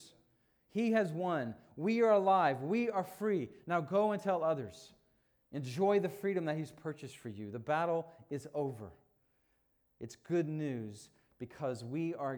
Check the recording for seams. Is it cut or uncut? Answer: uncut